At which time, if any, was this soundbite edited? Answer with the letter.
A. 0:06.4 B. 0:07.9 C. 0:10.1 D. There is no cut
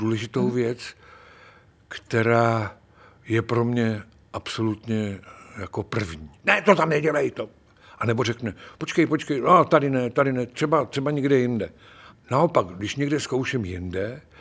A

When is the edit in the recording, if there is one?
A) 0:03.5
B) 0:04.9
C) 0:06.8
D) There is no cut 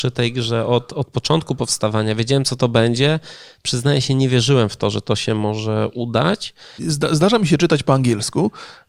C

